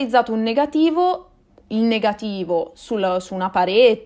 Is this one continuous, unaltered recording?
no; 1 cut; at 1.5 s

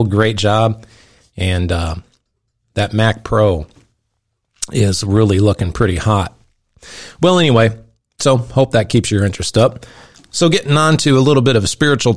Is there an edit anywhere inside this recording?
no; 0 cuts

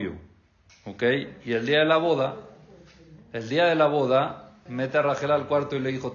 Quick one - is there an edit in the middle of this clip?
yes; 1 cut; at 4.7 s

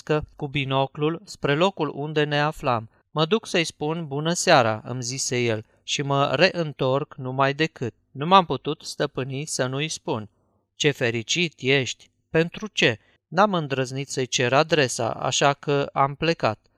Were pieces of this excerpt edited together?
yes; 2 cuts; at 3.0 s, 13.2 s

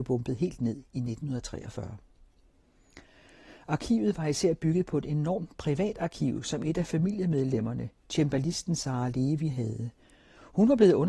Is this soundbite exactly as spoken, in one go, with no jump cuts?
yes; 0 cuts

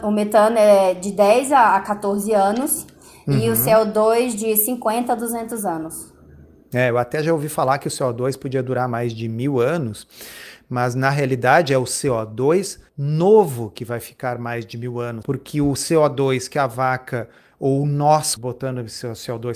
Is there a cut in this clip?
yes; 3 cuts; at 12.9 s, 15.2 s, 18.4 s

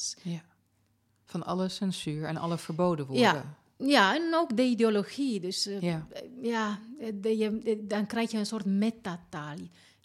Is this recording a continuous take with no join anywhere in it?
yes; 0 cuts

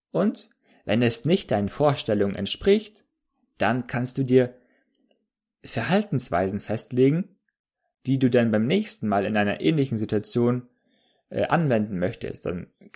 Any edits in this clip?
no; 0 cuts

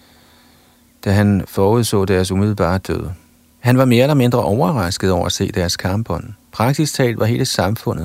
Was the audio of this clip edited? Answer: yes; 2 cuts; at 3.5 s, 6.4 s

